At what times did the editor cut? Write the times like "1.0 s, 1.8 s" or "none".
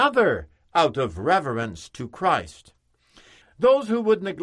3.4 s